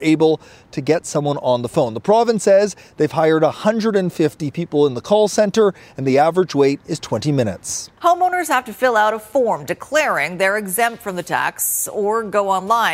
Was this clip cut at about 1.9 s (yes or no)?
no